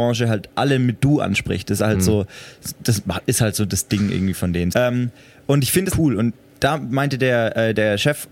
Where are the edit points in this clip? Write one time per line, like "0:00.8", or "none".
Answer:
0:04.7
0:05.9

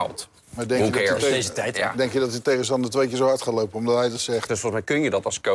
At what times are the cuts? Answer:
0:04.5

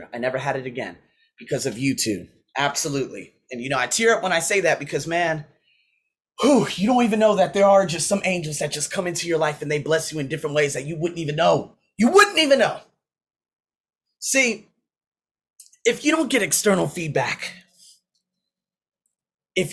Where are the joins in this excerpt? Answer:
0:02.5

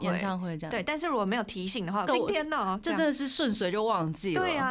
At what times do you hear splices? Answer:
0:02.1

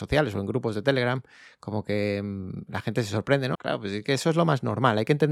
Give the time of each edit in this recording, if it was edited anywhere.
0:03.5

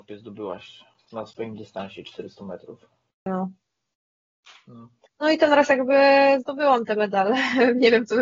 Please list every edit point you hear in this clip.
0:03.3
0:05.1

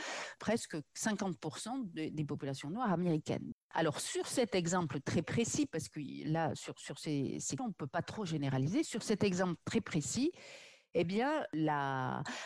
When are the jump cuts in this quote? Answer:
0:03.5
0:07.6

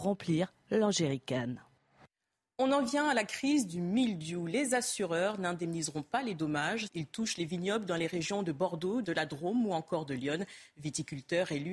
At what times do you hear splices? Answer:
0:06.9
0:09.0

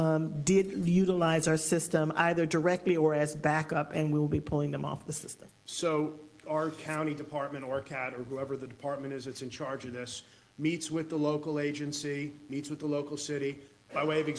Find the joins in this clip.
0:06.4

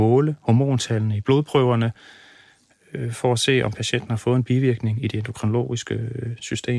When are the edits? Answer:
none

